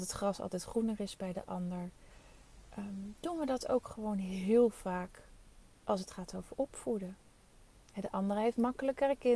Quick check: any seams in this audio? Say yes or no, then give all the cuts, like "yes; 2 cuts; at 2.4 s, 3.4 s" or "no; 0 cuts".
no; 0 cuts